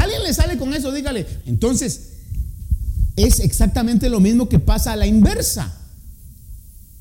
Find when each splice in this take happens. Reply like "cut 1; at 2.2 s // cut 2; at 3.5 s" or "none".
cut 1; at 1.4 s